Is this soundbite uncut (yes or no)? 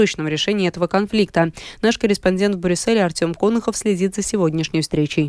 yes